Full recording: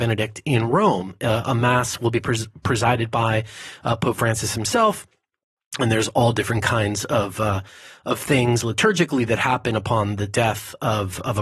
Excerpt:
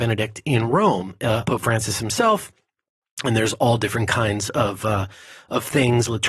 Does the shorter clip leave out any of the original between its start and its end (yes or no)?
yes